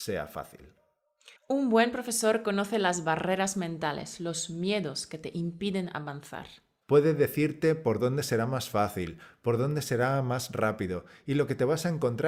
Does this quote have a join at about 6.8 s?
yes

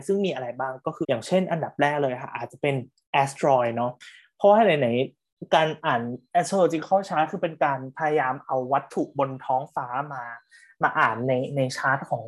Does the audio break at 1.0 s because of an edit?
yes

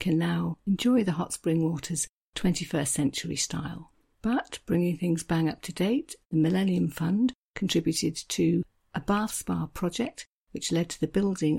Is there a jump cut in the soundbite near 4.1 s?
yes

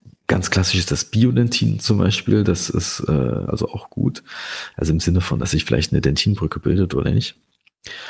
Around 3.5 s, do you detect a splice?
yes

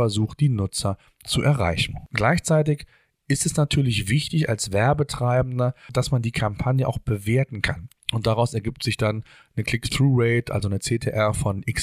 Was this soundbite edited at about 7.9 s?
yes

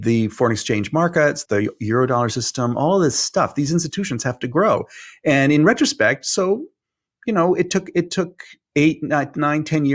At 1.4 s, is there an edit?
yes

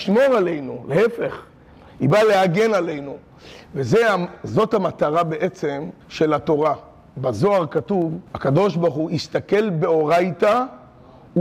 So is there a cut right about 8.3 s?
yes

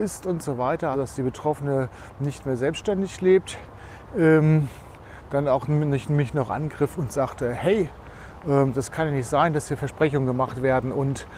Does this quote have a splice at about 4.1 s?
no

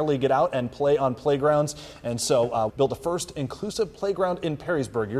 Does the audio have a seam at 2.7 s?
yes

